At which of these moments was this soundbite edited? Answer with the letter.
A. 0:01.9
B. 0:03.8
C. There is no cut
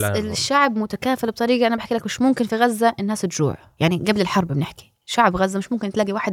B